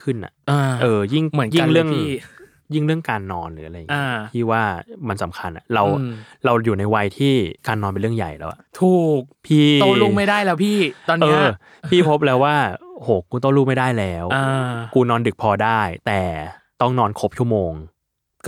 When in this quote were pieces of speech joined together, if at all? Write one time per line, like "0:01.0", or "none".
0:07.6
0:09.3